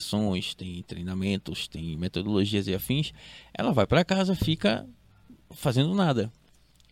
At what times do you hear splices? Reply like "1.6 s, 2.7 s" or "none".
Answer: none